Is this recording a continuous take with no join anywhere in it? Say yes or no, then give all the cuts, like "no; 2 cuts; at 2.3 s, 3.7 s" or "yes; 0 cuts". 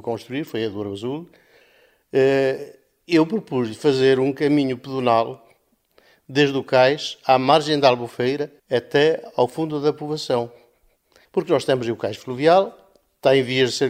no; 2 cuts; at 8.6 s, 11.2 s